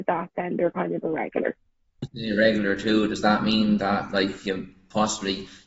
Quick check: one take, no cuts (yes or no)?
no